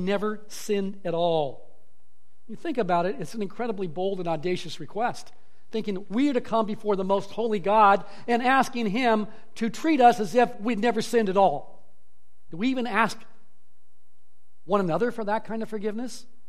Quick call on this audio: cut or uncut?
cut